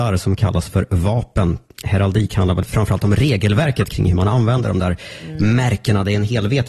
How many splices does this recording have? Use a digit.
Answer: 1